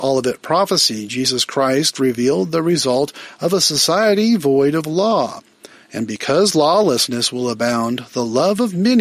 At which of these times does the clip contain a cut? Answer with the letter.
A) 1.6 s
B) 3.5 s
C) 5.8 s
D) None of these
D